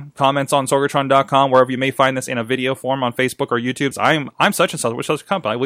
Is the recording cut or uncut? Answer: cut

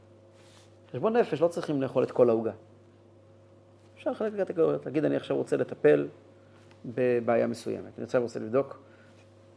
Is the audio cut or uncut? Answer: uncut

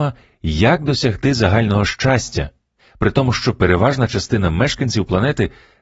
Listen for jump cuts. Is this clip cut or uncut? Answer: uncut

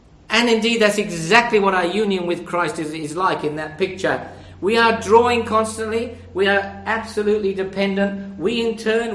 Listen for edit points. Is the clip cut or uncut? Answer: uncut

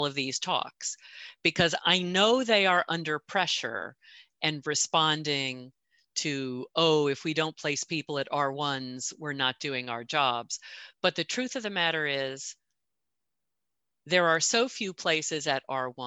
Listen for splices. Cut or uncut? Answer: uncut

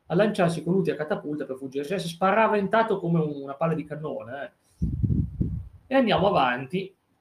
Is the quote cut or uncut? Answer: uncut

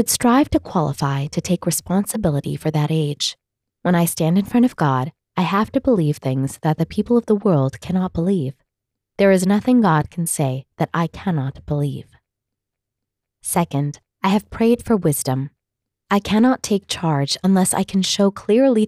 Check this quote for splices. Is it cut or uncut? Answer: cut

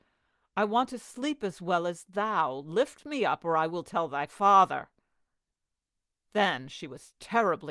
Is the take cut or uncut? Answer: uncut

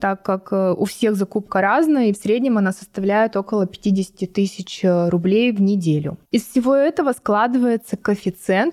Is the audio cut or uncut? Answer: cut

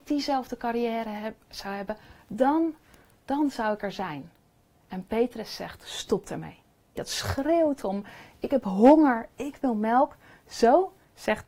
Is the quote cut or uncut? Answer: cut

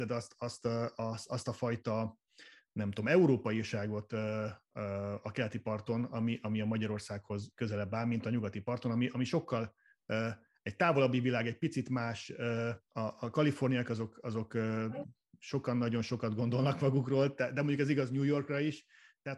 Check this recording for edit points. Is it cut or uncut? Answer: cut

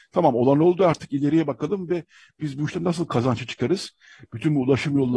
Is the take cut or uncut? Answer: uncut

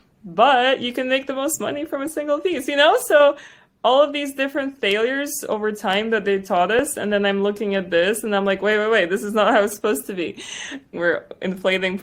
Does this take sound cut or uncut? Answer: cut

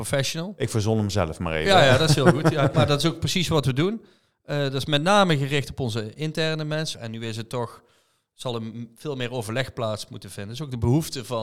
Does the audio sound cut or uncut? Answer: cut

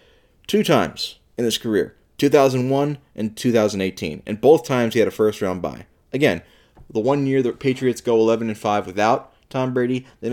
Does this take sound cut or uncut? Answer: uncut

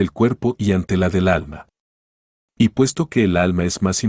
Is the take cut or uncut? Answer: uncut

